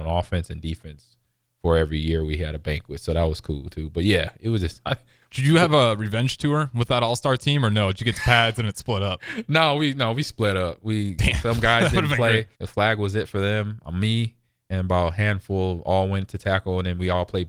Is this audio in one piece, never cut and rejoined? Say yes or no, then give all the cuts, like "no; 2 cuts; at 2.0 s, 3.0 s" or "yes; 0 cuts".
no; 1 cut; at 12.5 s